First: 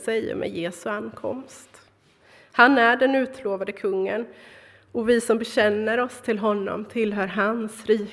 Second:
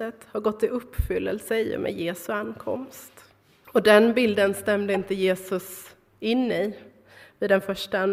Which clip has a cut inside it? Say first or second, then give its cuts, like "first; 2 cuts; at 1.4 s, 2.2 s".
second; 1 cut; at 3.6 s